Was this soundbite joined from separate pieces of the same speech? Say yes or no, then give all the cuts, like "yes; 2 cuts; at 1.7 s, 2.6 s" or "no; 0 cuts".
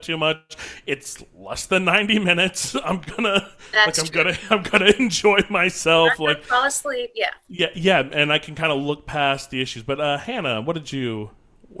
no; 0 cuts